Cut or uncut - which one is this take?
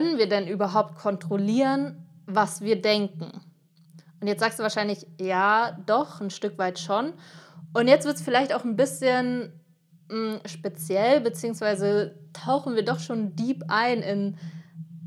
uncut